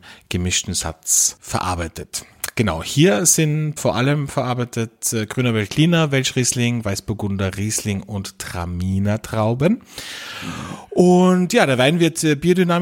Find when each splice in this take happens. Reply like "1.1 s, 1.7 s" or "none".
3.8 s